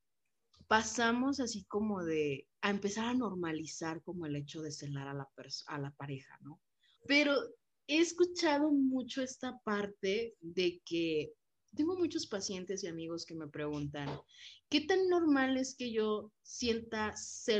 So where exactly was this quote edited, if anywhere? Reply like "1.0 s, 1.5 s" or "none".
2.5 s, 7.0 s, 11.8 s